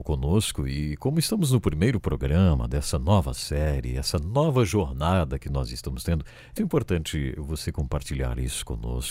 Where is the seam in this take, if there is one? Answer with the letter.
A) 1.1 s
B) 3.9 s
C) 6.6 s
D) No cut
C